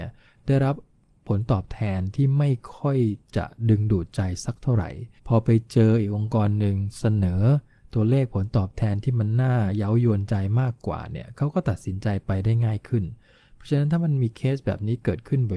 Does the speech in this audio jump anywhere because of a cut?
yes; 1 cut; at 5.2 s

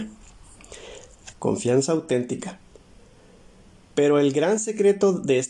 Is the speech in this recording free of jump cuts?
no; 1 cut; at 1.3 s

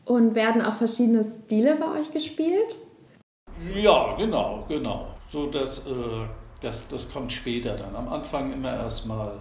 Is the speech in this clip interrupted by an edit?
no; 0 cuts

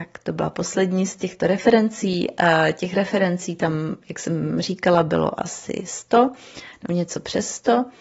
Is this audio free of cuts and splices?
yes; 0 cuts

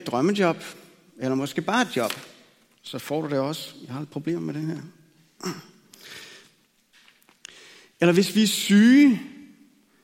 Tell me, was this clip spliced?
no; 0 cuts

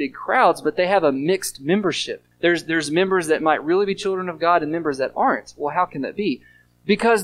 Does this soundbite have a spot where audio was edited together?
yes; 1 cut; at 2.3 s

